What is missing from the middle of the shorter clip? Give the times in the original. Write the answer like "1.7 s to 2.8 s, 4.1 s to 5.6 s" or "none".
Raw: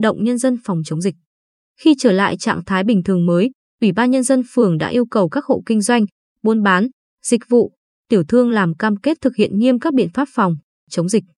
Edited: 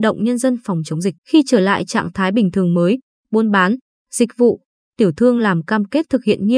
1.2 s to 1.7 s, 3.7 s to 6.3 s